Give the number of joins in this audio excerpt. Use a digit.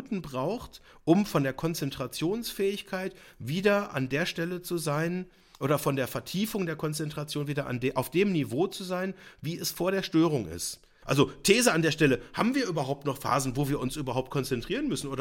1